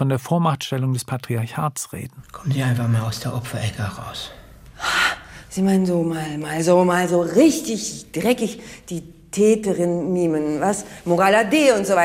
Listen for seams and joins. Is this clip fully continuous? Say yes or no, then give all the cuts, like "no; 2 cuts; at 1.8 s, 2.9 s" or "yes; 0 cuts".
yes; 0 cuts